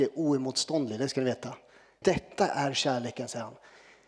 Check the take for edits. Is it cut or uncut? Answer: cut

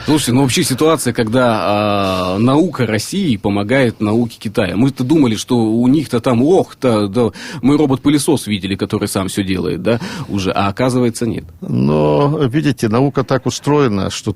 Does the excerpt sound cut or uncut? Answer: cut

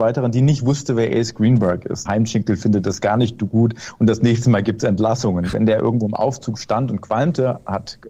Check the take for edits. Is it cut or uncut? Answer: cut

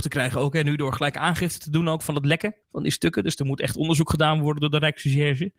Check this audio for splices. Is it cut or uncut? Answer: cut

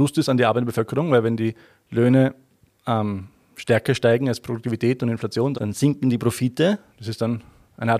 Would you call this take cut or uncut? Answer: cut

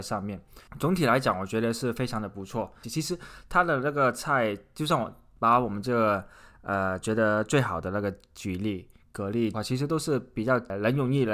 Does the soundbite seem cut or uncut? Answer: cut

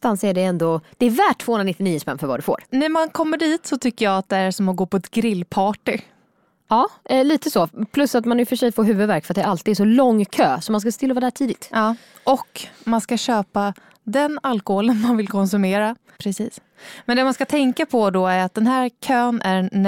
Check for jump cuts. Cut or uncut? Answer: cut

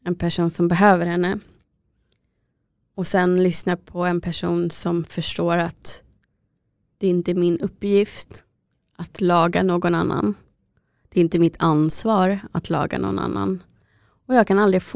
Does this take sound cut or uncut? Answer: uncut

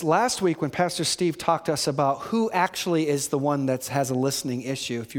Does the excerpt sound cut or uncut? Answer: uncut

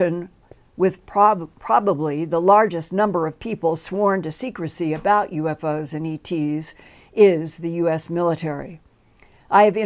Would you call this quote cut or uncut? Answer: uncut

